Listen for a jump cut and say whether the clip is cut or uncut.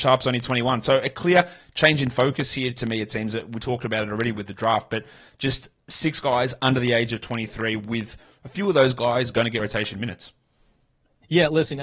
uncut